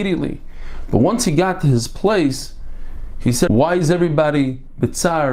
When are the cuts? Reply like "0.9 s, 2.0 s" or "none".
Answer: 3.5 s